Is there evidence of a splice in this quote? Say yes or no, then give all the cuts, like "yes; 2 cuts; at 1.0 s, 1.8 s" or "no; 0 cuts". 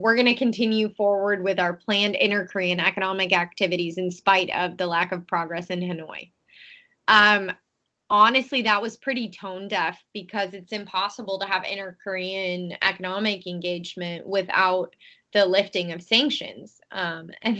no; 0 cuts